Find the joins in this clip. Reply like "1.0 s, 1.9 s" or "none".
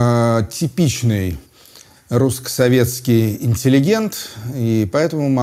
none